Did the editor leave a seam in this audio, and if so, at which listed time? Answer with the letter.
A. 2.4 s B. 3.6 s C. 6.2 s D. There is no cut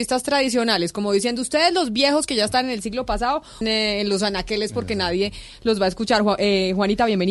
B